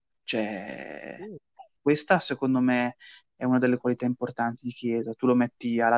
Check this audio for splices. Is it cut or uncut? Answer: uncut